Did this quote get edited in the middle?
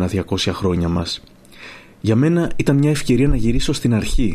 no; 0 cuts

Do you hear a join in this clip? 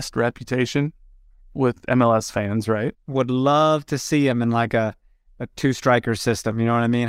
yes; 1 cut; at 2.9 s

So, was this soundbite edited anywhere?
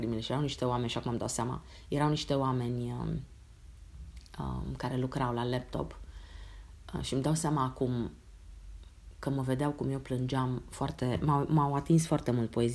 no; 0 cuts

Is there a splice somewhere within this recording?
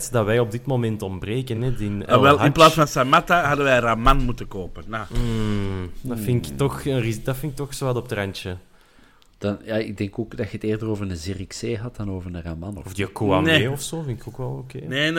no; 0 cuts

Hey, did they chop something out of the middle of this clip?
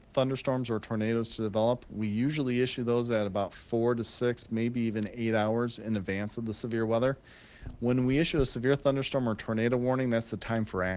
no; 0 cuts

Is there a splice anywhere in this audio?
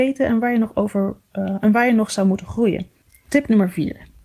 no; 0 cuts

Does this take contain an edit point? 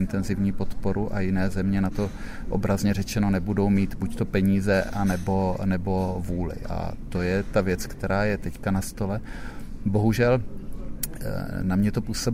no; 0 cuts

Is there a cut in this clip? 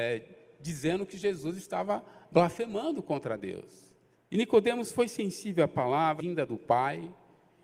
yes; 2 cuts; at 4.1 s, 6.2 s

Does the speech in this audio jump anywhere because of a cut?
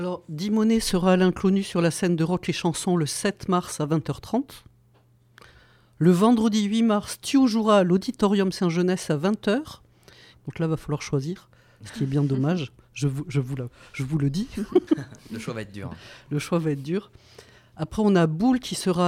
yes; 1 cut; at 10.3 s

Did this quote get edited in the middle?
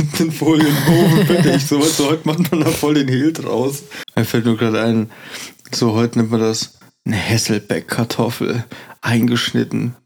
yes; 1 cut; at 4.0 s

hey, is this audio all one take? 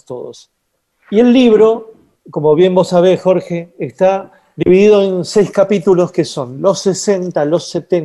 yes; 0 cuts

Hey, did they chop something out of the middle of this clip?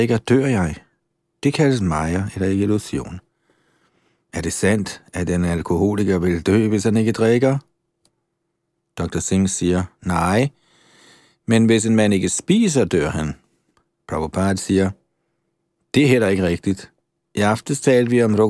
no; 0 cuts

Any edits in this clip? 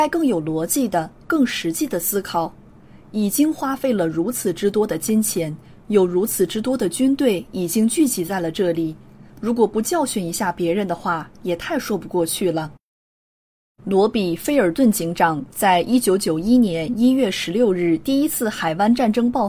yes; 1 cut; at 9.3 s

